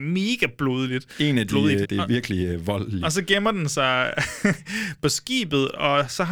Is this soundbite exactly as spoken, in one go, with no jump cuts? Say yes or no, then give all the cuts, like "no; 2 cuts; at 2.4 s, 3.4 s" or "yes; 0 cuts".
no; 1 cut; at 1.8 s